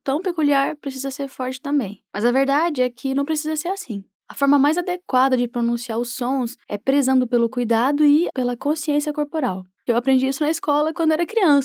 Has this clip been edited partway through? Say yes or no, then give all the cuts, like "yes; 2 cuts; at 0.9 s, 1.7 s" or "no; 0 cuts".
yes; 2 cuts; at 8.3 s, 9.9 s